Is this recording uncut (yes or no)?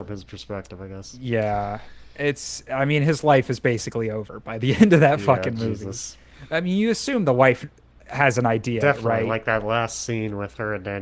yes